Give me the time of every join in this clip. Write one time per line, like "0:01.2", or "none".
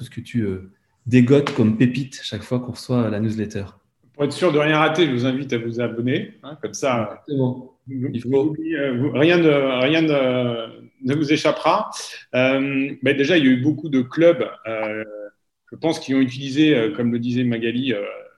none